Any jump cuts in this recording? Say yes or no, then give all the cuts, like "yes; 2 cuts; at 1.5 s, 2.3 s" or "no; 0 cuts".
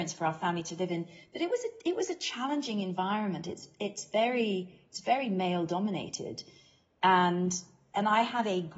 no; 0 cuts